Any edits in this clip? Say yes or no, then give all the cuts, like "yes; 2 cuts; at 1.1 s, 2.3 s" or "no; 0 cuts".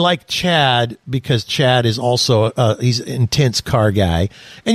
no; 0 cuts